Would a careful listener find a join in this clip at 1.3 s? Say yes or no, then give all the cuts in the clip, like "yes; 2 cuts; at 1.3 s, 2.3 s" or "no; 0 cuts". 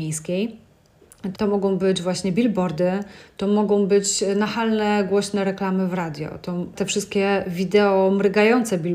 yes; 2 cuts; at 1.3 s, 6.8 s